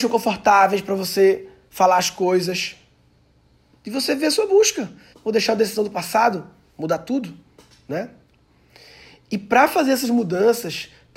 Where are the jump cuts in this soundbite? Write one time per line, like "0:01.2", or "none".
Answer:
0:05.1